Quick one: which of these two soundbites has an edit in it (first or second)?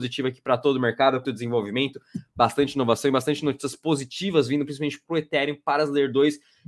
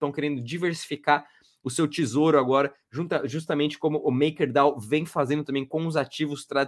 first